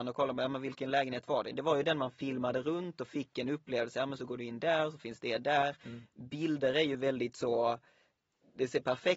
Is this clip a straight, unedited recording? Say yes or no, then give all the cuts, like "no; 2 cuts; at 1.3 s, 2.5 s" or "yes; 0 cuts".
yes; 0 cuts